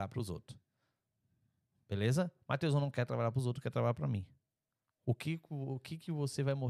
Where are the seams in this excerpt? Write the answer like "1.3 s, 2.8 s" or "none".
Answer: none

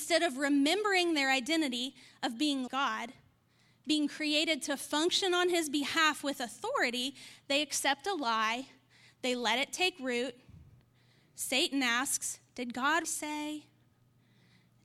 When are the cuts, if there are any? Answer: 2.7 s, 13.0 s

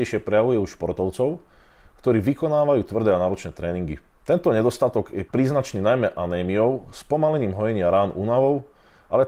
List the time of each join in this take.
none

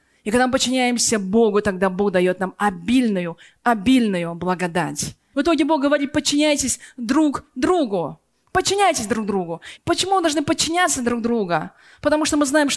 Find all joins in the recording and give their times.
5.3 s, 9.8 s

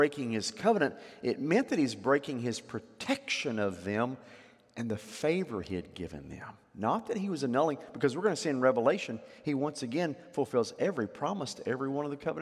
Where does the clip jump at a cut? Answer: none

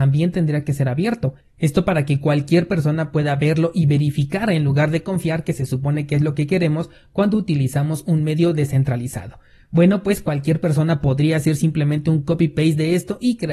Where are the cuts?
none

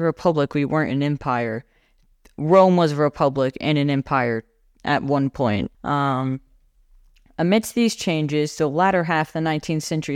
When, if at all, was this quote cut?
5.7 s

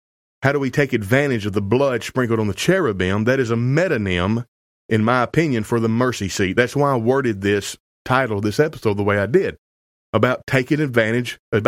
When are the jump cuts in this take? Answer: none

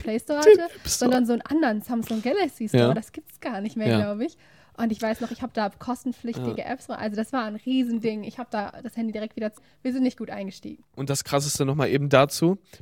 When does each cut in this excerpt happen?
9.6 s

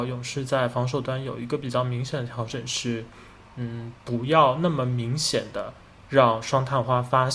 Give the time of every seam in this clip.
none

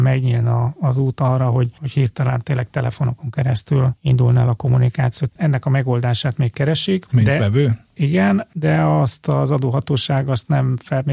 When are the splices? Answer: 5.3 s, 7.1 s

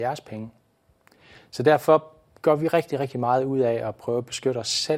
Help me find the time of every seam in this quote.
none

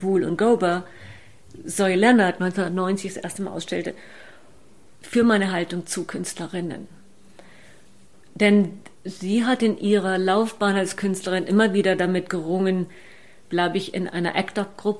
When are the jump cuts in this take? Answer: 4.9 s, 13.4 s

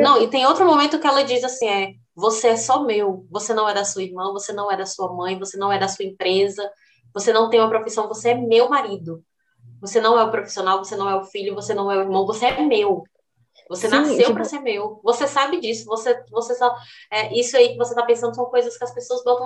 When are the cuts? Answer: none

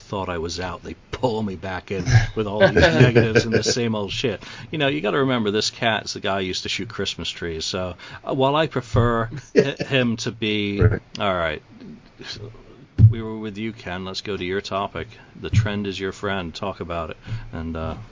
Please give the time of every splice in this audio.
11.0 s

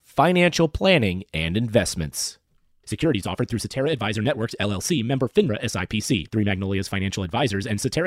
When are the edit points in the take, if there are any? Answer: 6.3 s

